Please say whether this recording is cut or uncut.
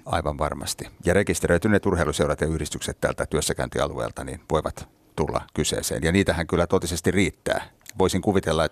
cut